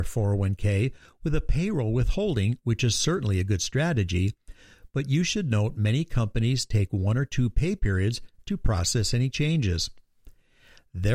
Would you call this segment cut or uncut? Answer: uncut